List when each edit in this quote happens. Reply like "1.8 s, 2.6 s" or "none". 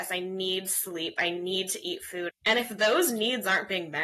2.3 s